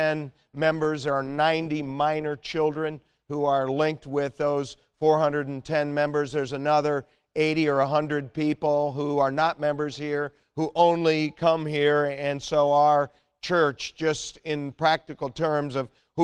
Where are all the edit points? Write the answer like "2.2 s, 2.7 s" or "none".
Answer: none